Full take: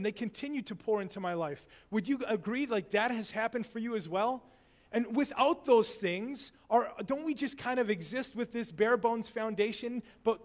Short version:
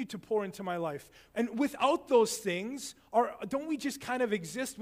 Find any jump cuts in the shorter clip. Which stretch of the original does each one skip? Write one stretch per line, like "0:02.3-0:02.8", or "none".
0:01.9-0:04.9